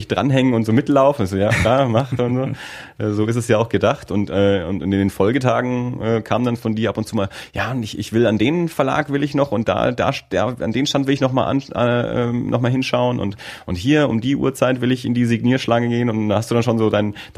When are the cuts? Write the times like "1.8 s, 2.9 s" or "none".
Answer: none